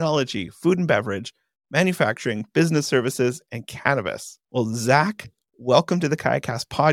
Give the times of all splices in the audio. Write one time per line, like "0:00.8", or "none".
none

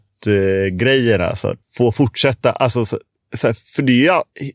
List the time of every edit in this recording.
0:01.6

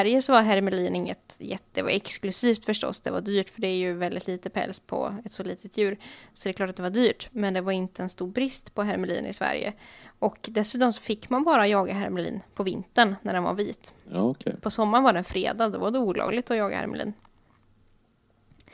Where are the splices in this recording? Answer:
none

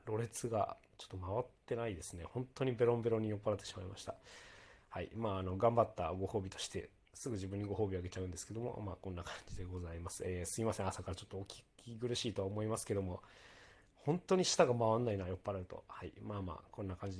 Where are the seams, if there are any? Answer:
none

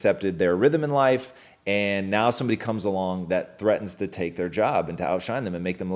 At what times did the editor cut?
none

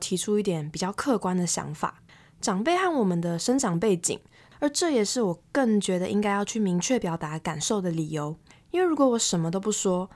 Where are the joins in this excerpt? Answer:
0:04.5

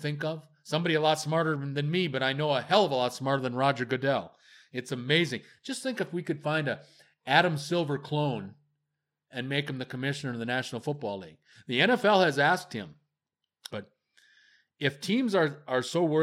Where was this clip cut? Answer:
0:13.7

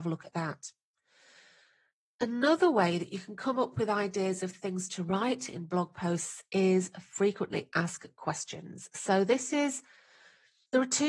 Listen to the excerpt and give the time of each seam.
none

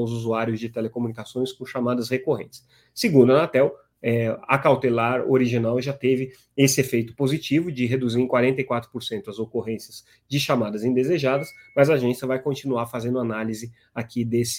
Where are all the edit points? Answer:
none

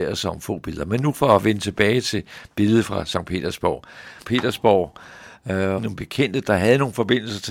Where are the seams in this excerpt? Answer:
0:04.2
0:05.8

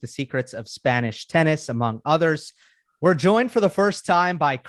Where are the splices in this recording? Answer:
0:02.9

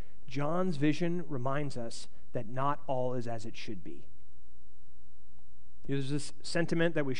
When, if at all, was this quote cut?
0:05.8

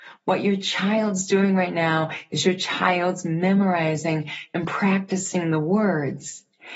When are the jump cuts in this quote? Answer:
none

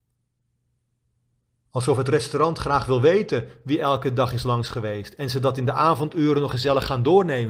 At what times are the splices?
0:06.5

